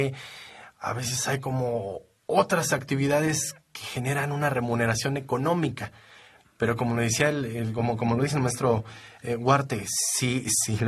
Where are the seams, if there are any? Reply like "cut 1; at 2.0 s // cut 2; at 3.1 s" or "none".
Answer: none